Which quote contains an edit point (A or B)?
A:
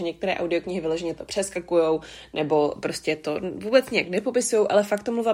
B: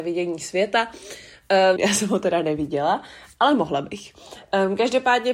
B